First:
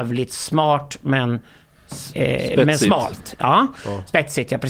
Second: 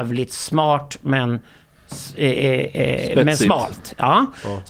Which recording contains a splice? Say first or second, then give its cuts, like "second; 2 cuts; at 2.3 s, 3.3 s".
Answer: first; 1 cut; at 2.1 s